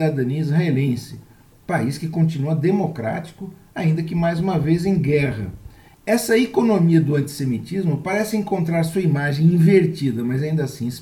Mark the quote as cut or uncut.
uncut